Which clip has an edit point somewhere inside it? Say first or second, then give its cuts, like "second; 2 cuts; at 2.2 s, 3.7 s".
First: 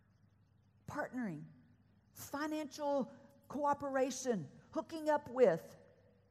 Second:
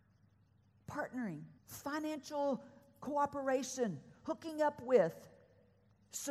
second; 1 cut; at 1.6 s